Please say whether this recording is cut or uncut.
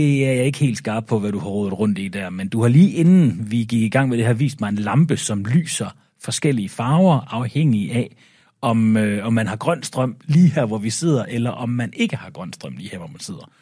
uncut